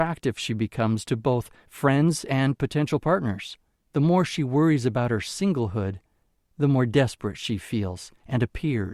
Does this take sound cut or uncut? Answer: cut